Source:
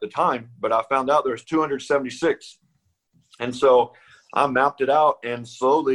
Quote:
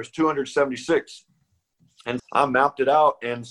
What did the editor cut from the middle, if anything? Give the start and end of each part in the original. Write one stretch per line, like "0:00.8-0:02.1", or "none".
0:03.5-0:04.2